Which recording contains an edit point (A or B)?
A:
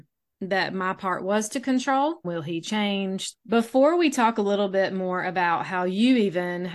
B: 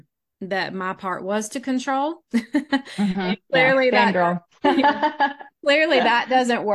A